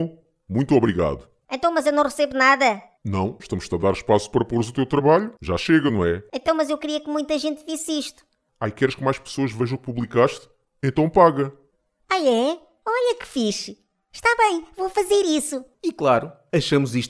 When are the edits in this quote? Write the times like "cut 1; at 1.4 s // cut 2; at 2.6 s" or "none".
cut 1; at 3.4 s